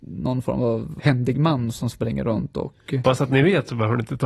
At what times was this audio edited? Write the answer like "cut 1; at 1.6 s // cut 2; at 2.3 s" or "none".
cut 1; at 1.0 s // cut 2; at 3.0 s